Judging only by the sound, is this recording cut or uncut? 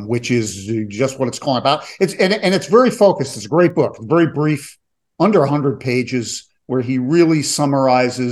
uncut